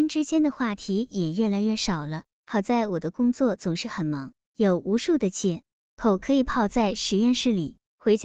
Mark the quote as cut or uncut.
uncut